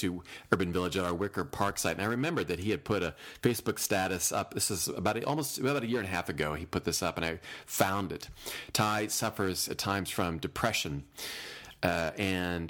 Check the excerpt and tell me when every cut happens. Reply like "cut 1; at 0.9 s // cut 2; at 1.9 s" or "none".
none